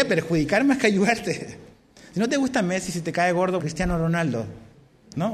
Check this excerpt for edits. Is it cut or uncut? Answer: cut